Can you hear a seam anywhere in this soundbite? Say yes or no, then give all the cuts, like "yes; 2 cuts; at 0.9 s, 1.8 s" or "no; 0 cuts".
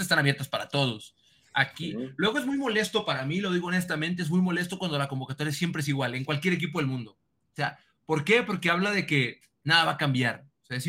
no; 0 cuts